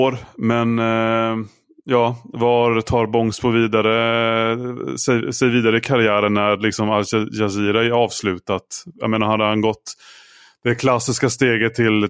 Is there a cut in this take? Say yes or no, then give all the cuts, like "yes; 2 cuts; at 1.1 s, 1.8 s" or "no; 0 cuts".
no; 0 cuts